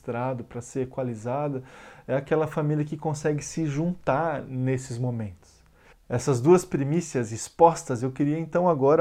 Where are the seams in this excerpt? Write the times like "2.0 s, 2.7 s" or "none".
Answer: 5.9 s